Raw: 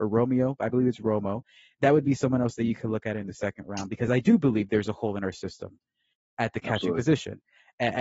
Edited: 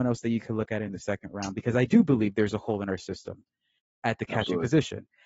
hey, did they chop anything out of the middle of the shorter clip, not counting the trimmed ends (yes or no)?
no